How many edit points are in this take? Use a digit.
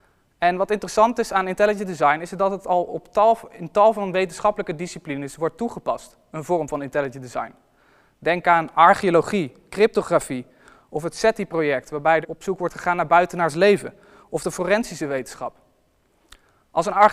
1